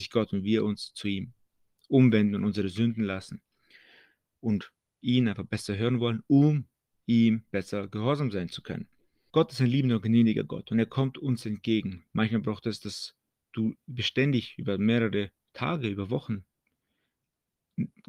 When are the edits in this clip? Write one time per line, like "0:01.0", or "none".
0:09.3
0:12.1